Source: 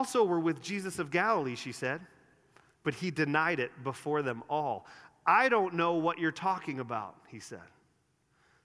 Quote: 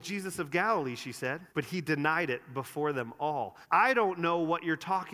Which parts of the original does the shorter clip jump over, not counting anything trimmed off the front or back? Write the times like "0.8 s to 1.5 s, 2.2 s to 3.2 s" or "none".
2.1 s to 2.8 s, 4.9 s to 5.2 s